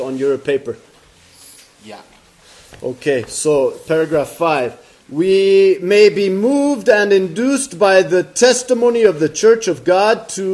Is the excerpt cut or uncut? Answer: uncut